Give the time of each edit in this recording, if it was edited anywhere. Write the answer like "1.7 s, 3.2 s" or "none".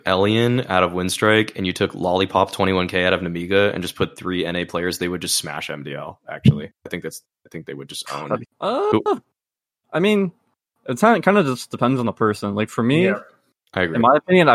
8.5 s